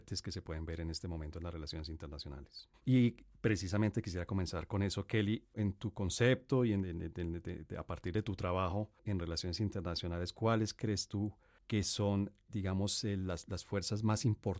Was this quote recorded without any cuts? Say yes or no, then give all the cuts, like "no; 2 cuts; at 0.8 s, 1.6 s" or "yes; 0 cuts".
no; 1 cut; at 2.7 s